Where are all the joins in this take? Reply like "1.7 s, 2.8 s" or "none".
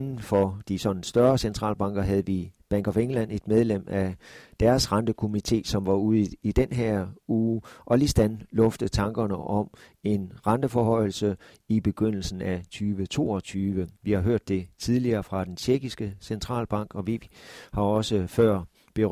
14.0 s